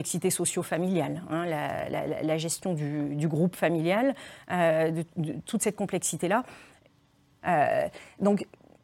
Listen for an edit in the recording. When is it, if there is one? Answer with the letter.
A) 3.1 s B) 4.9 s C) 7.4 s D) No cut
C